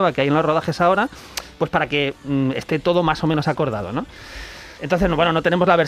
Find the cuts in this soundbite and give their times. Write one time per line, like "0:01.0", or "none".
0:04.8